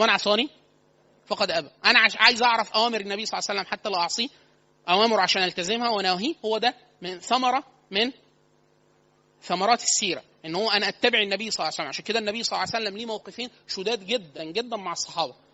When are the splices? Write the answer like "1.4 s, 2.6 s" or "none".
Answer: 14.4 s

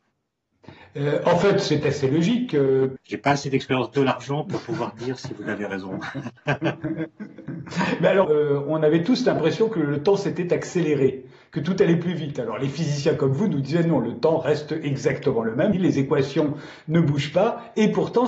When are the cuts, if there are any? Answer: 3.0 s, 8.2 s, 15.7 s

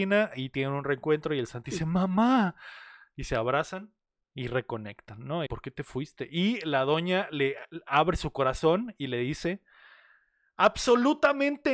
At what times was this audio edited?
5.5 s

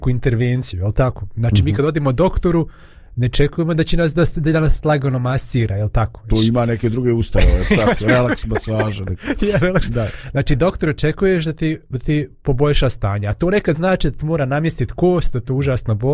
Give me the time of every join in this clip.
6.3 s

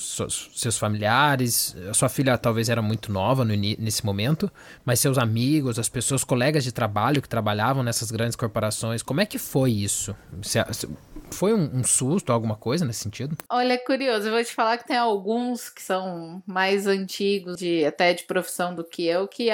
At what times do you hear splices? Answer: 13.5 s, 17.6 s

